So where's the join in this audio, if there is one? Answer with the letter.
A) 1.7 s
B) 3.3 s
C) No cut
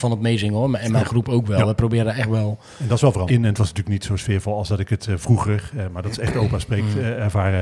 B